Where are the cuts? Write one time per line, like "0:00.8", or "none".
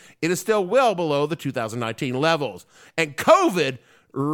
0:02.8